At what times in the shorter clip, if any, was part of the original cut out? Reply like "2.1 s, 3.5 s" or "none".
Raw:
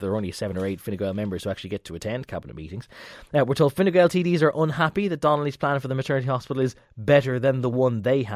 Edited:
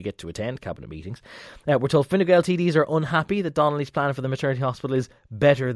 none

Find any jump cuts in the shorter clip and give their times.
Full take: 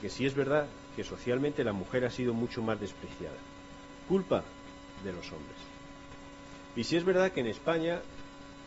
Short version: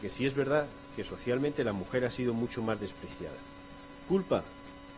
none

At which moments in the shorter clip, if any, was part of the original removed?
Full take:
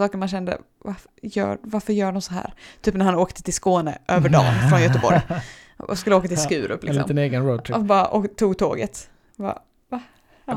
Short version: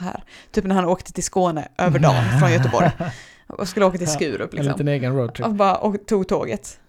none

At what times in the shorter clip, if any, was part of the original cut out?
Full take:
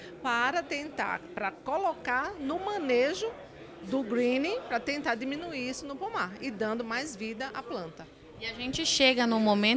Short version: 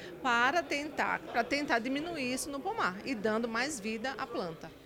1.3 s

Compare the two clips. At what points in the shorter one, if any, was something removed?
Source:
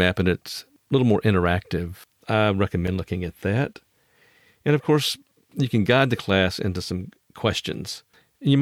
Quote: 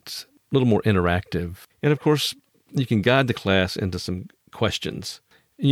1.7 s

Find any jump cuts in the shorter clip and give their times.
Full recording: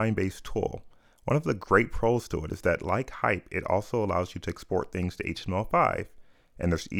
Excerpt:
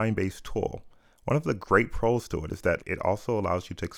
2.8 s

